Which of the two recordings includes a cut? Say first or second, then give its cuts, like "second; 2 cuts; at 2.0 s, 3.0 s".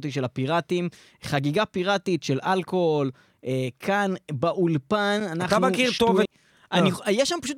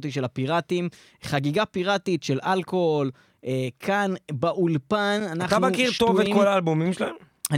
first; 1 cut; at 6.3 s